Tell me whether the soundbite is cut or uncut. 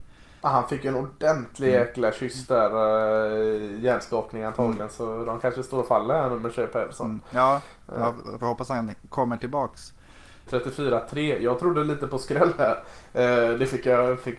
cut